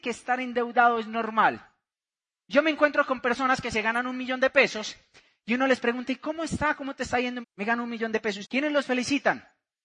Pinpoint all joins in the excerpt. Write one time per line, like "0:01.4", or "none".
0:07.4
0:08.4